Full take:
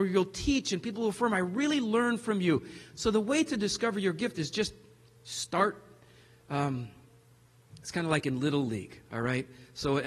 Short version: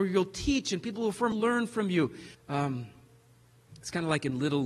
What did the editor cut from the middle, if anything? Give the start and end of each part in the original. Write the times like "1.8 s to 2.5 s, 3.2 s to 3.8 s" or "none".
1.3 s to 1.8 s, 2.9 s to 6.4 s